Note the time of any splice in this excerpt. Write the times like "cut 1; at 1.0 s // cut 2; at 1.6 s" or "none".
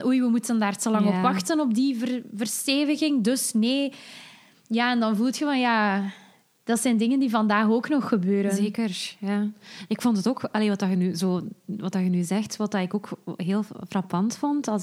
none